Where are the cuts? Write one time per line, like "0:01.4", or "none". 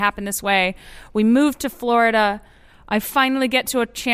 none